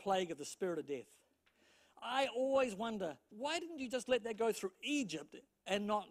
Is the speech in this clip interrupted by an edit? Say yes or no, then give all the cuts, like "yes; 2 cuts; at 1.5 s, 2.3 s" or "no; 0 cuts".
yes; 1 cut; at 3.3 s